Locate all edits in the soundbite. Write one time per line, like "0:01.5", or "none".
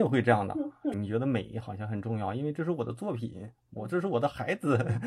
0:00.9